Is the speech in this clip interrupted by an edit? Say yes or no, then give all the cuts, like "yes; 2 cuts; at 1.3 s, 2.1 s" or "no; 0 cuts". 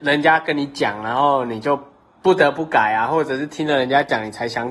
no; 0 cuts